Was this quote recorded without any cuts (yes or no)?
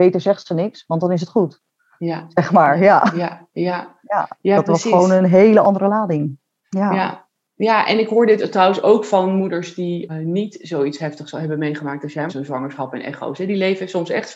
no